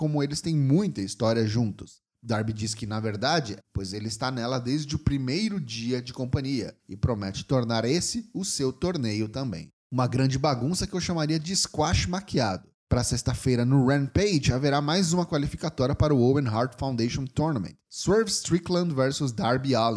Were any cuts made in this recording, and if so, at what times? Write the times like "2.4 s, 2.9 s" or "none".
3.6 s, 9.8 s, 12.7 s